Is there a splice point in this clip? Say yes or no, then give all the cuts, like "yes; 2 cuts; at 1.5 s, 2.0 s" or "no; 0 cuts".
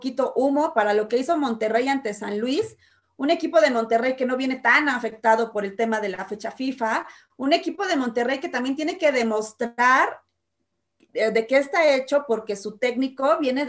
no; 0 cuts